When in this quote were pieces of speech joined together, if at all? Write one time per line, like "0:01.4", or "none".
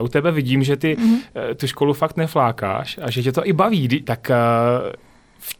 0:04.0